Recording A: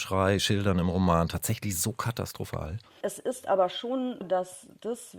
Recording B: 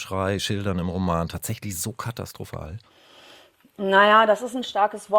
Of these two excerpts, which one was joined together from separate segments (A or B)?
A